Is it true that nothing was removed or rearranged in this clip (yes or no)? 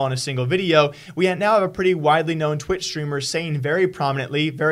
yes